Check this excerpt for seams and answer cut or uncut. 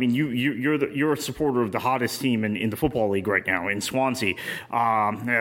uncut